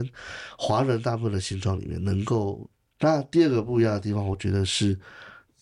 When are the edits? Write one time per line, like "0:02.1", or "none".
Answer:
0:03.0